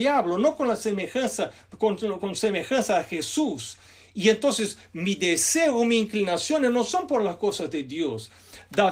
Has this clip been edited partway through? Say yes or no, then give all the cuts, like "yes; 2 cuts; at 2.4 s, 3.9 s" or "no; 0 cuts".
no; 0 cuts